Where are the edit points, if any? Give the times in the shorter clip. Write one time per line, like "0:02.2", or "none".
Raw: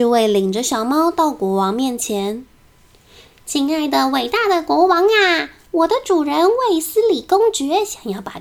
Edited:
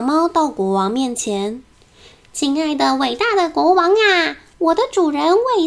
0:01.7